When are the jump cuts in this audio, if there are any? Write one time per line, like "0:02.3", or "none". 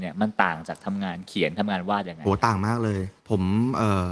0:03.2